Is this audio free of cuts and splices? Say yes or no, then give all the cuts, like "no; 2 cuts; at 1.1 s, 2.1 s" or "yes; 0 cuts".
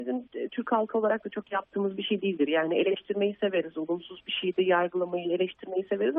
yes; 0 cuts